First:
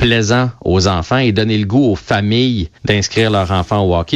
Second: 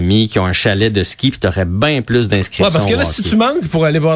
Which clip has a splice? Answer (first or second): first